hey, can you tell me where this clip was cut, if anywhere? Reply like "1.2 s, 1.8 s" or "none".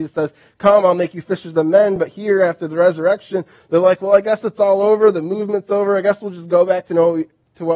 none